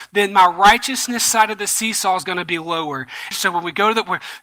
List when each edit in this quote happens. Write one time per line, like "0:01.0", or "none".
0:03.3